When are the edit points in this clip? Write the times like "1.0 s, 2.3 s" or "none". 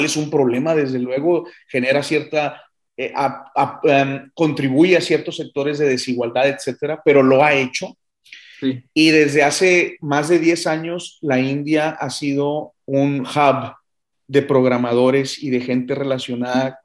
none